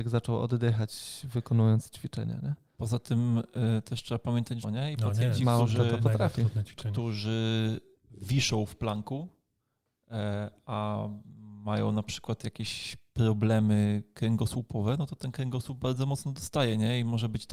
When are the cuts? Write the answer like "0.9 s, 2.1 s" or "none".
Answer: 4.6 s